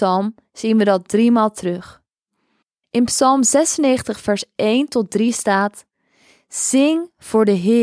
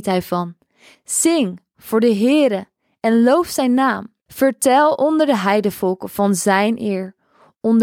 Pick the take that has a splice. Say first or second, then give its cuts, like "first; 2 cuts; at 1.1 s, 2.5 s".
second; 2 cuts; at 0.9 s, 4.3 s